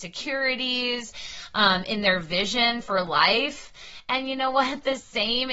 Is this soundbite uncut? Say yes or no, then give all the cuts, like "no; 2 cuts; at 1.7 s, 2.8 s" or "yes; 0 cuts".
yes; 0 cuts